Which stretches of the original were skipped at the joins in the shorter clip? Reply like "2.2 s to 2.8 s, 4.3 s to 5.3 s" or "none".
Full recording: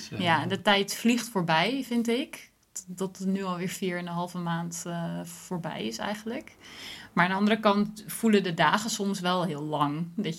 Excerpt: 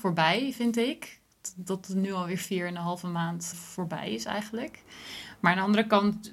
4.8 s to 5.3 s